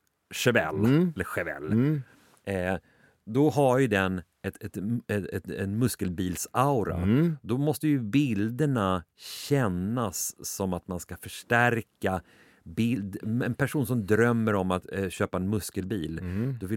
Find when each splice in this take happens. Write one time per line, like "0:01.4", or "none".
none

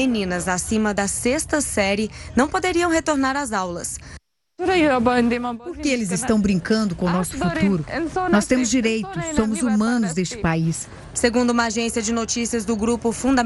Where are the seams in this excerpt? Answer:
0:11.1

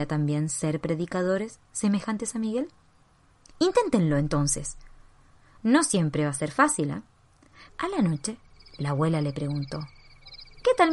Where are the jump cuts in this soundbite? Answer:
0:07.7

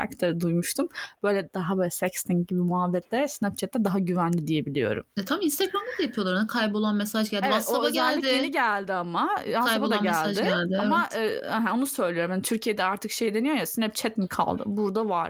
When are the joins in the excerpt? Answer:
0:01.2

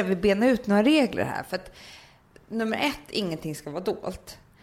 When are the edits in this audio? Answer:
0:02.3

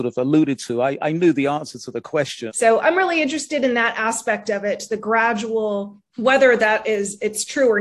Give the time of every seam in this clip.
0:02.5
0:06.1

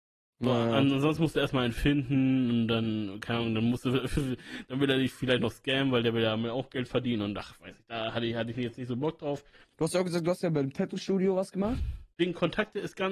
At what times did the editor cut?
0:09.7
0:12.1

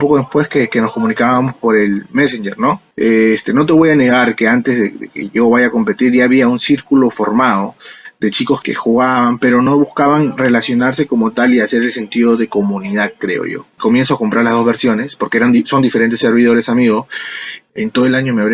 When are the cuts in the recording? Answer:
0:02.9
0:13.7

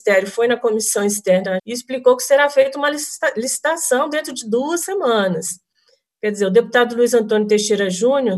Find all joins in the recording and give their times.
0:01.6

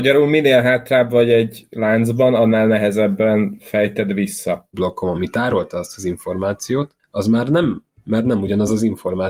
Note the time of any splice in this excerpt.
0:04.7
0:08.0

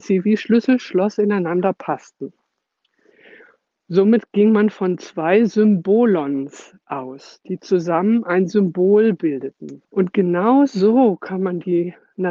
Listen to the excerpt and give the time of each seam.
0:09.8

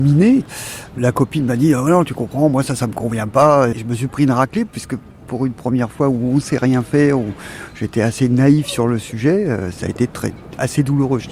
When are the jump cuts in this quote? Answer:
0:03.7

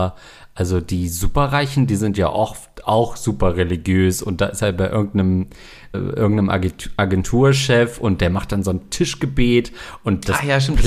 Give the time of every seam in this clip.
0:05.9

